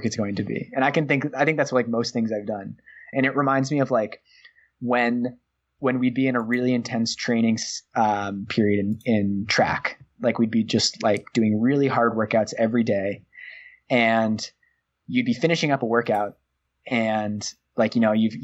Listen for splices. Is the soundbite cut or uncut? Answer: cut